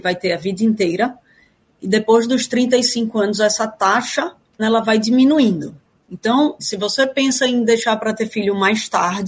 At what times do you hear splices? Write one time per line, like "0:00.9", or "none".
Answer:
0:04.6
0:06.6